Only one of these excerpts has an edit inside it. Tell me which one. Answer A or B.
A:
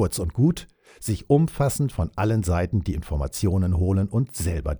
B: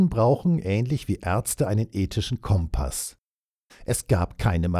B